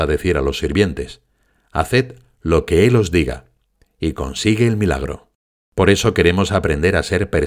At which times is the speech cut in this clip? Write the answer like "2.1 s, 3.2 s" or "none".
5.6 s